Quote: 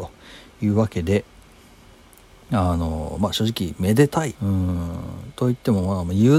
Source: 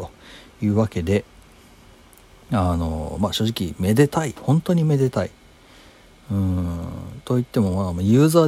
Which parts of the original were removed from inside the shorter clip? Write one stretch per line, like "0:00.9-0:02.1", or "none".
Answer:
0:04.3-0:06.2